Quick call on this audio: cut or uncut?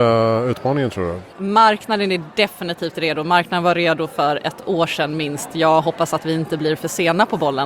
cut